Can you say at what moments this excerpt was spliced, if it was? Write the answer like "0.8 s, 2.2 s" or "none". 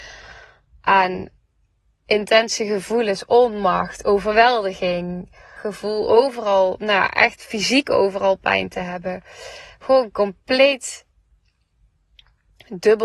5.6 s